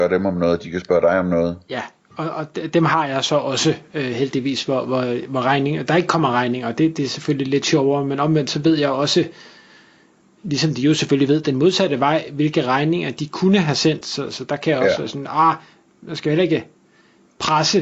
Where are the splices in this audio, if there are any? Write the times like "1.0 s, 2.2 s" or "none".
14.0 s